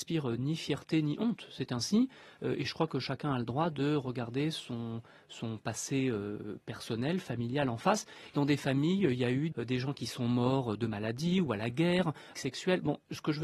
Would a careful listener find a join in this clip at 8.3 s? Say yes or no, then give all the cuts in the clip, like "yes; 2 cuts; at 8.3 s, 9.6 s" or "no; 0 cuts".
yes; 3 cuts; at 8.3 s, 9.5 s, 12.3 s